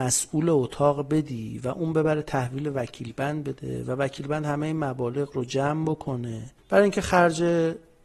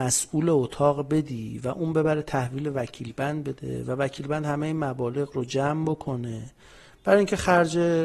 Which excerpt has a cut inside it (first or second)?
first